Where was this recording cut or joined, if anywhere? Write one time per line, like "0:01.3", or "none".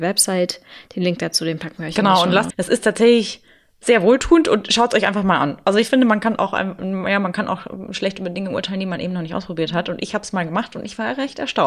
0:02.5